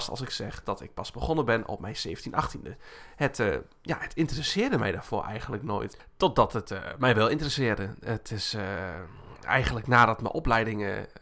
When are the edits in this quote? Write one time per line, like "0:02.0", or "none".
none